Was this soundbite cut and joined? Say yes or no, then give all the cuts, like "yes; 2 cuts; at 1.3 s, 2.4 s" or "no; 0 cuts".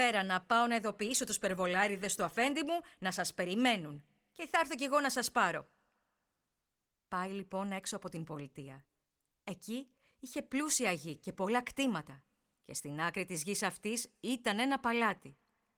no; 0 cuts